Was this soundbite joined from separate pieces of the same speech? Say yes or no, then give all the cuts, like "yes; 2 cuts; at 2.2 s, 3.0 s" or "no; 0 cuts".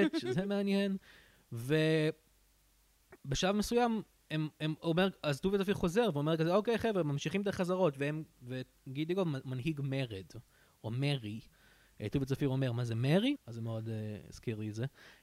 yes; 2 cuts; at 3.2 s, 13.4 s